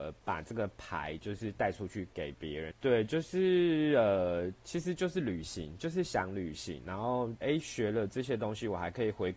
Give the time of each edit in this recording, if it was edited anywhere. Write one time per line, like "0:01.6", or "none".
0:02.7
0:07.4

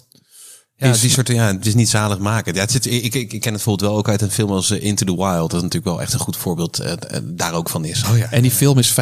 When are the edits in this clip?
0:08.0

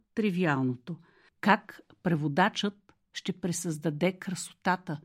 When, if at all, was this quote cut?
0:01.3

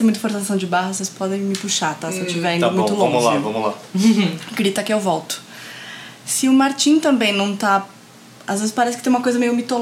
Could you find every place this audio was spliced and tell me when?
none

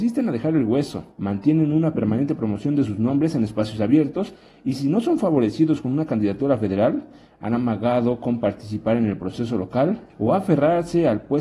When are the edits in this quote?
0:01.1
0:10.1

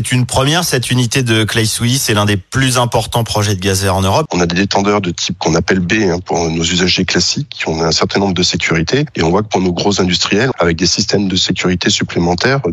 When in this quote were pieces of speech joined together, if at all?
0:04.3
0:10.5

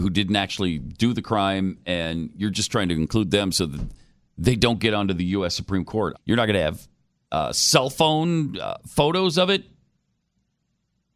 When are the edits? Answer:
0:06.1

